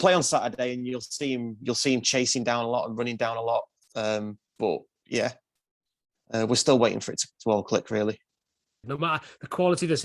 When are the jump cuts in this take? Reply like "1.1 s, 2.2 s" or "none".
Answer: 8.8 s